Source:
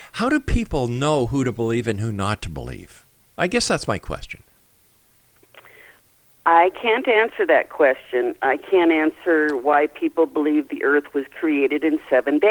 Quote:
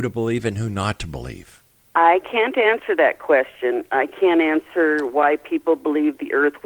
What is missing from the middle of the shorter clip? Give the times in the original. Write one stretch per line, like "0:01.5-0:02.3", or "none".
0:03.3-0:06.4